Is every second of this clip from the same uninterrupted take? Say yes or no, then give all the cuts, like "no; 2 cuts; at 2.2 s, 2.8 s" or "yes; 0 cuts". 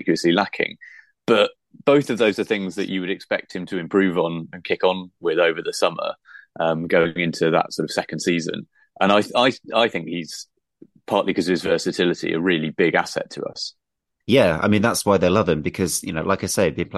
yes; 0 cuts